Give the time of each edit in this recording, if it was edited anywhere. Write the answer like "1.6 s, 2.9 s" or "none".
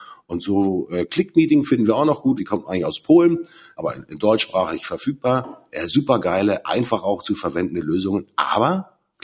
2.4 s, 3.8 s